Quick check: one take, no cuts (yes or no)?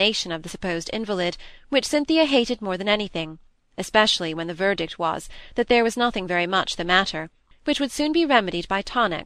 no